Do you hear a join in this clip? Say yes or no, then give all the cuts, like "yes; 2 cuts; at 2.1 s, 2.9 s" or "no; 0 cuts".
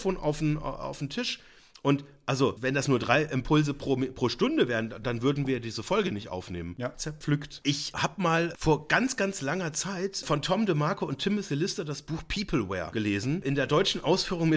yes; 2 cuts; at 5.0 s, 6.9 s